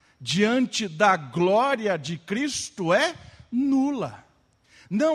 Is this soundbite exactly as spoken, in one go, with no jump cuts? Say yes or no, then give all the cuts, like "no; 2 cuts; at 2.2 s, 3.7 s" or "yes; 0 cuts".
yes; 0 cuts